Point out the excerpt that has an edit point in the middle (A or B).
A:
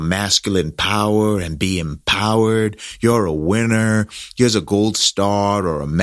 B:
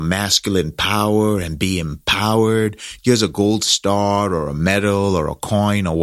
B